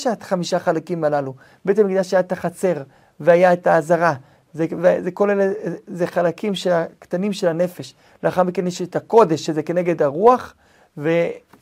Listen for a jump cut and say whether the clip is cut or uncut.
uncut